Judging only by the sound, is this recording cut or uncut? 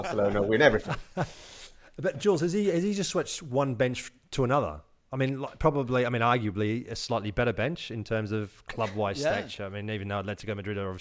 uncut